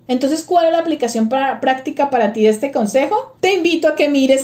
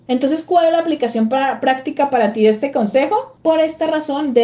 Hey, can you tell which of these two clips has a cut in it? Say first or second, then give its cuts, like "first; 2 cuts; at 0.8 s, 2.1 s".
second; 1 cut; at 3.4 s